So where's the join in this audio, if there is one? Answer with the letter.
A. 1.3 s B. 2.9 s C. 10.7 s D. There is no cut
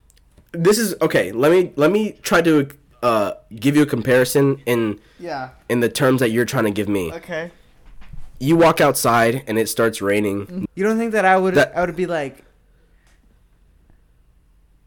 C